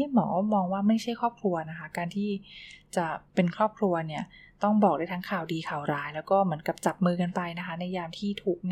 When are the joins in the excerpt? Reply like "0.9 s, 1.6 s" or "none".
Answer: 3.3 s